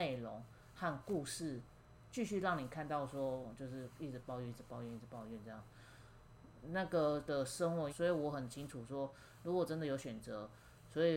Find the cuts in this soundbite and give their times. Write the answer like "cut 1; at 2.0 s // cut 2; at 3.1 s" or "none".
cut 1; at 7.9 s

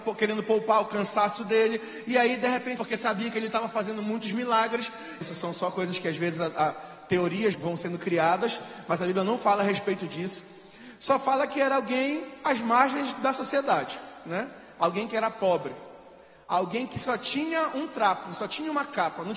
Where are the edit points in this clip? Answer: cut 1; at 2.8 s // cut 2; at 5.2 s // cut 3; at 7.5 s

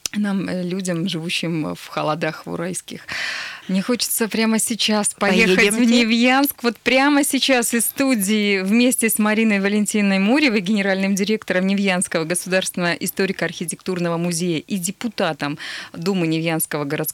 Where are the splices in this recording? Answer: cut 1; at 3.6 s

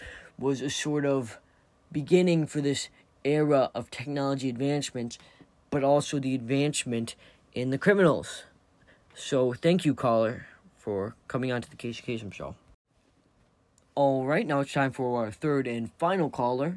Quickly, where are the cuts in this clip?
none

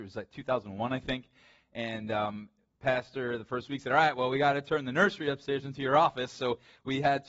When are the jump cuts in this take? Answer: none

